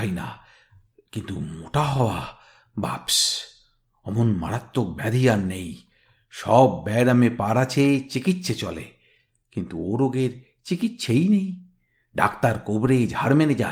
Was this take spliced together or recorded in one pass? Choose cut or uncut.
uncut